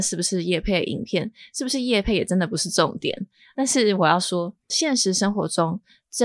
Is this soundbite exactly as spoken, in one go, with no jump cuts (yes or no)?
yes